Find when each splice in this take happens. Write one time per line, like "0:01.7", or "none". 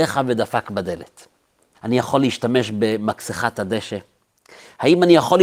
0:01.7